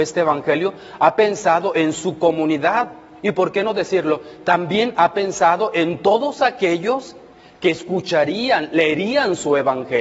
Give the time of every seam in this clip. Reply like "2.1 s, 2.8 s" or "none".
none